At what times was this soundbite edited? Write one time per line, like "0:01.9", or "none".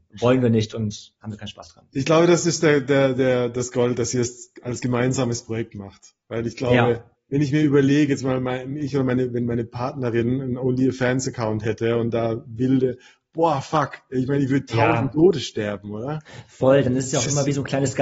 none